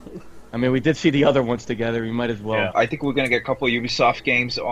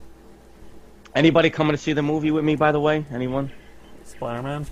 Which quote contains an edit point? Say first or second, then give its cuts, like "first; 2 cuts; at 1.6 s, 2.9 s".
first; 1 cut; at 2.7 s